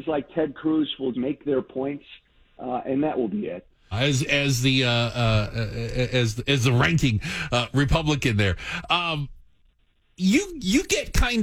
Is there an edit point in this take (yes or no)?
yes